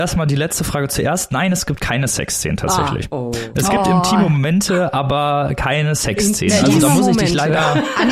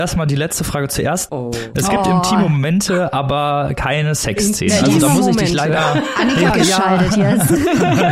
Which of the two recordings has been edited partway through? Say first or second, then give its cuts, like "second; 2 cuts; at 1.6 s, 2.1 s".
second; 2 cuts; at 1.3 s, 6.5 s